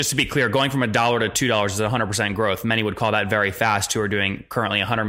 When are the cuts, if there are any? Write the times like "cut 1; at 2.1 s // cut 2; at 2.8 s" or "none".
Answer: none